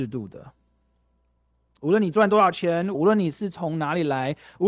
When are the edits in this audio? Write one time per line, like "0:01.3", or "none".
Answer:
0:02.9